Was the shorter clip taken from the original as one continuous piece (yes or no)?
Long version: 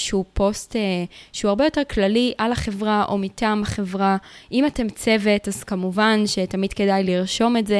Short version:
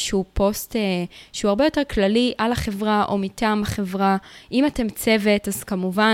yes